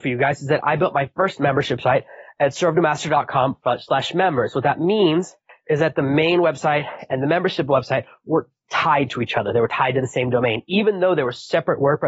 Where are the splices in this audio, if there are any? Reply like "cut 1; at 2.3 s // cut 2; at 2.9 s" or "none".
none